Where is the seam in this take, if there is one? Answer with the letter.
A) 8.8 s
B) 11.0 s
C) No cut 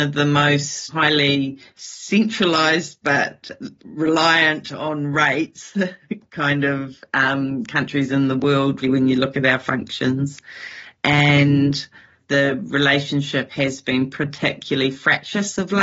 A